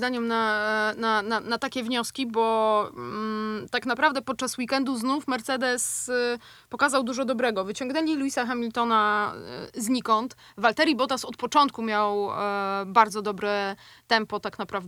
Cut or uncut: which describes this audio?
uncut